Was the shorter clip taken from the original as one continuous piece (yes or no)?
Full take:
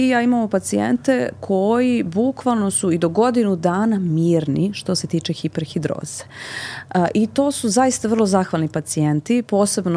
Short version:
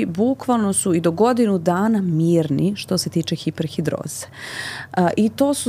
yes